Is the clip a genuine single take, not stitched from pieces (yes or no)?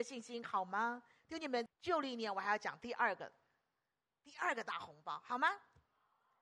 no